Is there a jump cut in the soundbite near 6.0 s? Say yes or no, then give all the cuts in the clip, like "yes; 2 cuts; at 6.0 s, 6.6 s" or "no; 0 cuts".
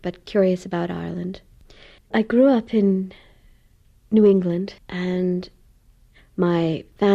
no; 2 cuts; at 2.0 s, 4.8 s